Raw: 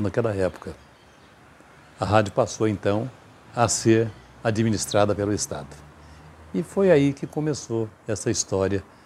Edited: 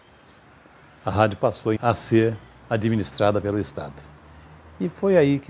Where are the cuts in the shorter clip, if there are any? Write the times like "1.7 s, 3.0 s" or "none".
1.8 s

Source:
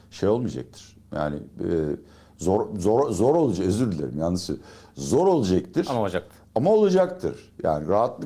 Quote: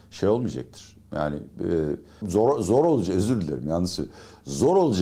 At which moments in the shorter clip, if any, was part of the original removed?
2.2 s

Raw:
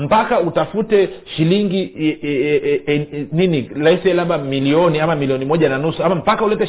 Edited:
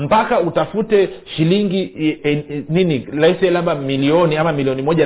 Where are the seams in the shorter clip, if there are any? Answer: 2.2 s

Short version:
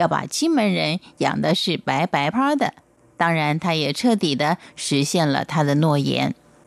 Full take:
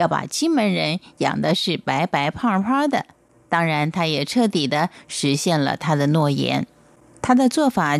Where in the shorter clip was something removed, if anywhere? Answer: 2.3 s

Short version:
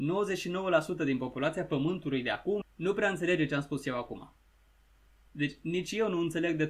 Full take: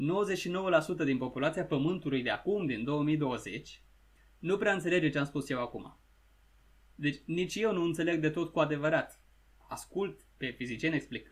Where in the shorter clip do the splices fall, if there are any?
2.6 s

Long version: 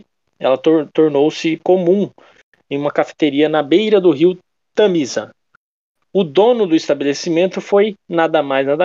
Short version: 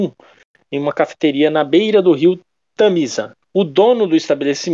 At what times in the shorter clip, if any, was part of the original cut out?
3.4 s

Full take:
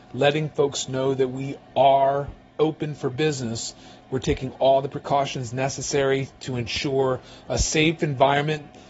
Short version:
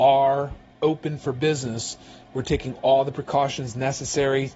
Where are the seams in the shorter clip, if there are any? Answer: none

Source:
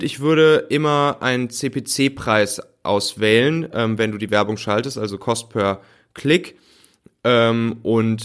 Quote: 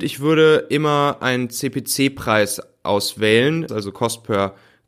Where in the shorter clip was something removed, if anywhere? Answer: 3.7 s

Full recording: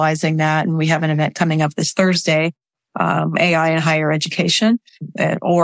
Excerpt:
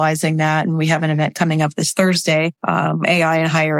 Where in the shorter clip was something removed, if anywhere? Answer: 2.6 s

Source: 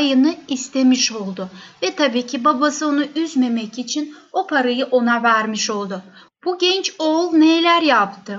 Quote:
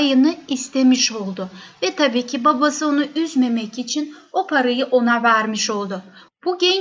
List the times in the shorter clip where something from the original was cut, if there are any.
none

